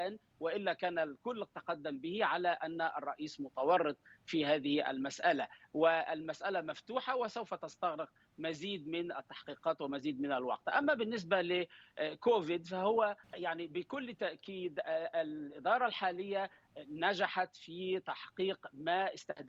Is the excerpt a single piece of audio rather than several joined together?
no; 1 cut; at 13.2 s

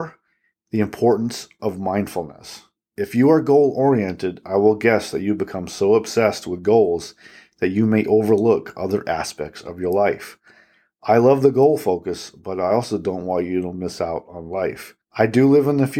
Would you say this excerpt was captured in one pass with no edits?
yes; 0 cuts

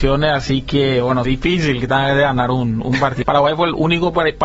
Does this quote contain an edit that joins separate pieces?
yes; 2 cuts; at 1.2 s, 3.2 s

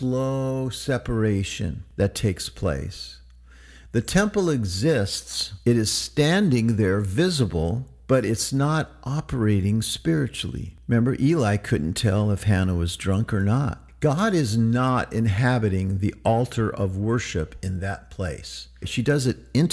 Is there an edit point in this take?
yes; 1 cut; at 18.8 s

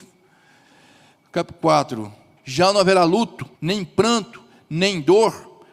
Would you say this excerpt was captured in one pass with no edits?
no; 2 cuts; at 2.4 s, 3.5 s

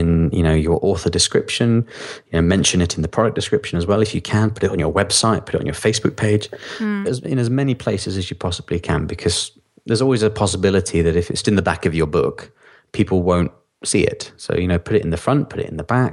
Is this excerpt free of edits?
no; 2 cuts; at 7.0 s, 11.4 s

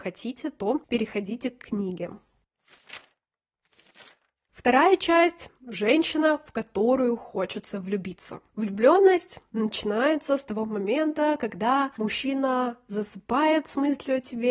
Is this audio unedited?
no; 1 cut; at 8.5 s

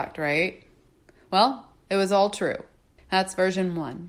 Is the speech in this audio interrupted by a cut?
yes; 1 cut; at 3.0 s

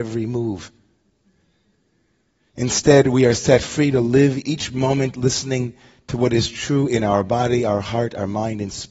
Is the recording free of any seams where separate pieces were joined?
yes; 0 cuts

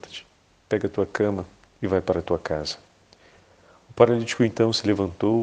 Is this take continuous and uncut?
yes; 0 cuts

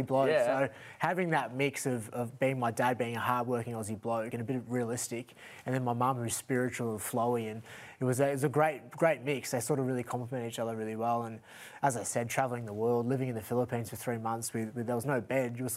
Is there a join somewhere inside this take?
no; 0 cuts

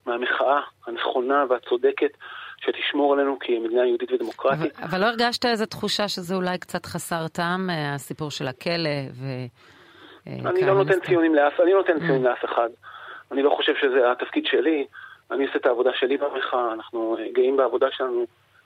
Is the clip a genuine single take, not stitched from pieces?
yes; 0 cuts

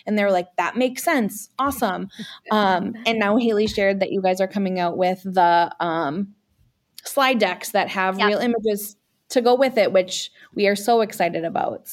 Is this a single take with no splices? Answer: yes; 0 cuts

